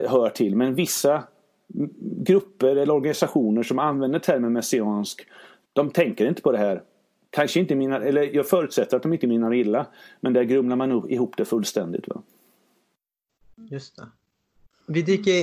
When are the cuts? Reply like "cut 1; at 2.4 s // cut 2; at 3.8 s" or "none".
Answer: none